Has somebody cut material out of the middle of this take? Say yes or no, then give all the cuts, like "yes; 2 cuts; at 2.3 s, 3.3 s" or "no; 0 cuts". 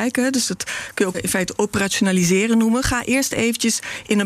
yes; 1 cut; at 1.1 s